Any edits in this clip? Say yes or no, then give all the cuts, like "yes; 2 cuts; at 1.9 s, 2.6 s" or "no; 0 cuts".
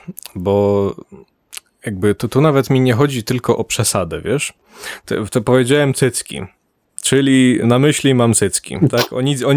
yes; 1 cut; at 7.6 s